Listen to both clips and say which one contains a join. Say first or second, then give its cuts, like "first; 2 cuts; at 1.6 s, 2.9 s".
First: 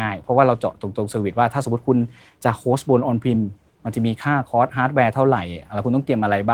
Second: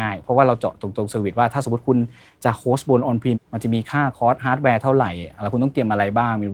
second; 1 cut; at 3.3 s